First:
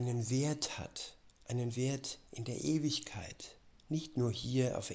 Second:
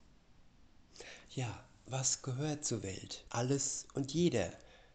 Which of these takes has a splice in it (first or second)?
second